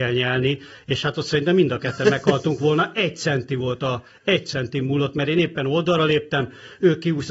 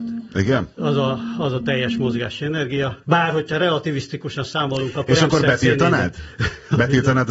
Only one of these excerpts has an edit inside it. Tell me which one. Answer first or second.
second